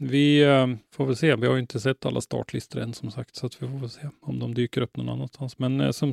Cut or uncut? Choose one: uncut